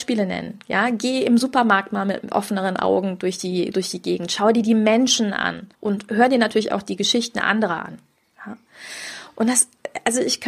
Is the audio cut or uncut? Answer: cut